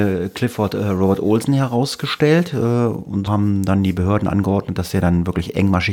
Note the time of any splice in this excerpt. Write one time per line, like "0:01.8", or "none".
0:03.3